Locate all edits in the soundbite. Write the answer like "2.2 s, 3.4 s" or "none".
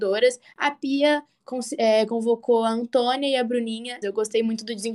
4.0 s